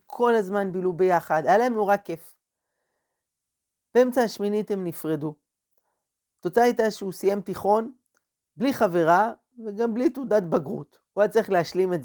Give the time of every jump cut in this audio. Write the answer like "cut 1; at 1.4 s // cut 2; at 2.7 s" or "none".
none